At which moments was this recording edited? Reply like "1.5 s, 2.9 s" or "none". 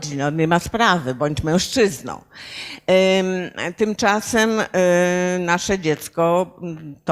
none